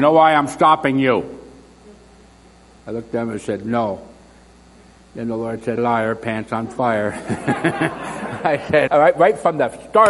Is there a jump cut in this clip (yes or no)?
yes